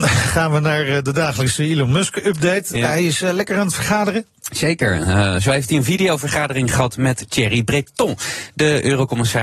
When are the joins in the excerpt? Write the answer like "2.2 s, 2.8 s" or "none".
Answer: none